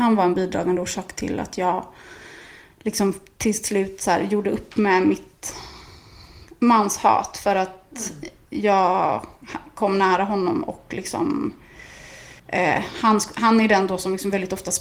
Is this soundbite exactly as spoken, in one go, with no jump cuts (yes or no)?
no